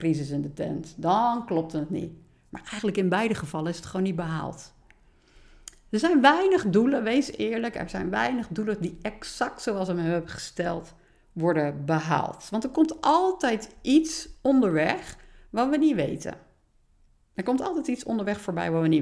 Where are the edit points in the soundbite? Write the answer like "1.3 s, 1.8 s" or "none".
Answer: none